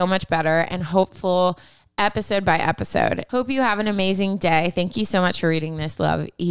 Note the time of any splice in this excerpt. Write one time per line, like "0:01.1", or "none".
none